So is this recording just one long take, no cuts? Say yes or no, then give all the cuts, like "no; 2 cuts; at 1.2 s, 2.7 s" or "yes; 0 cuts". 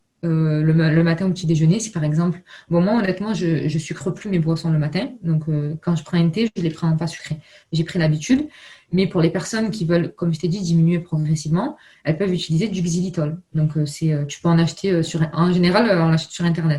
yes; 0 cuts